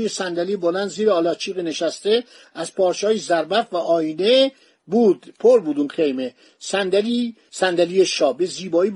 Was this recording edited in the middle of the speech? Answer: no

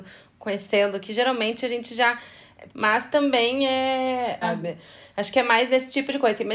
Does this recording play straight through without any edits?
no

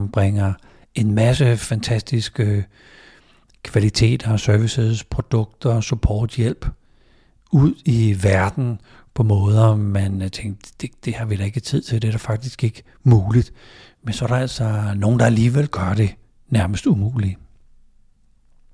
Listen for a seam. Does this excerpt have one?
no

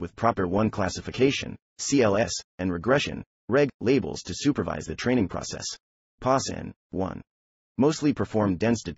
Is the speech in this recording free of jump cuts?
no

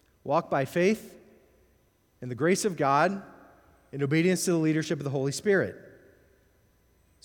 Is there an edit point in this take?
no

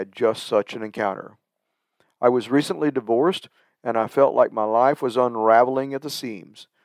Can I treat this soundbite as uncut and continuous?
yes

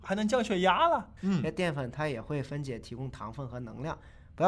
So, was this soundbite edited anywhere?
yes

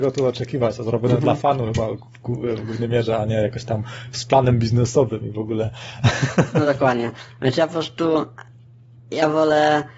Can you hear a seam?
no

